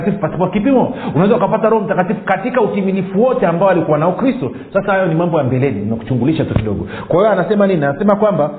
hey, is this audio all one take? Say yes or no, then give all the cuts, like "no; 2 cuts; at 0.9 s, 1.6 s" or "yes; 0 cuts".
yes; 0 cuts